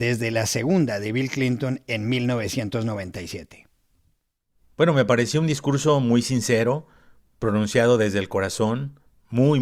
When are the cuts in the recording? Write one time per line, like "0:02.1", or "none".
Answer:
none

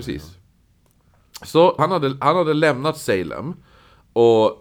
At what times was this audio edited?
0:01.8

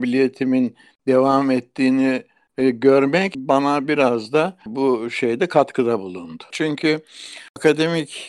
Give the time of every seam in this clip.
0:06.5

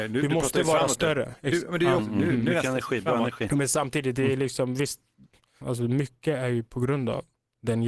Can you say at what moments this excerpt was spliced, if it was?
0:02.0

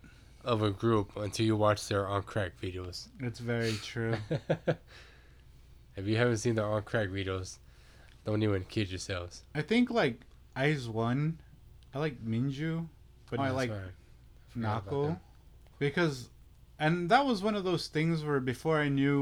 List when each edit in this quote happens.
0:13.4
0:15.7

